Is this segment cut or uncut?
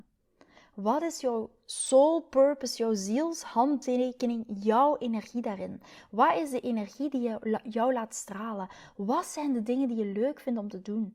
uncut